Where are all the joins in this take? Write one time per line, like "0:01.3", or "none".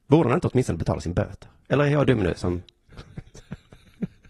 none